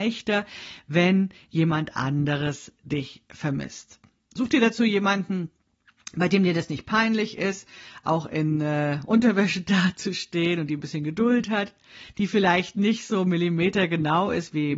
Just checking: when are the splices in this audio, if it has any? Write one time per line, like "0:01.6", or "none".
none